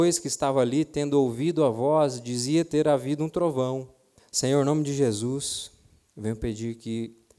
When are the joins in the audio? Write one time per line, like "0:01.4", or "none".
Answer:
0:04.2